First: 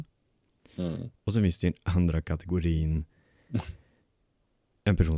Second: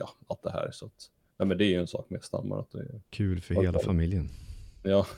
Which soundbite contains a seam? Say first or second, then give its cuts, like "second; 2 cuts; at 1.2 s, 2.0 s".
second; 2 cuts; at 1.3 s, 3.1 s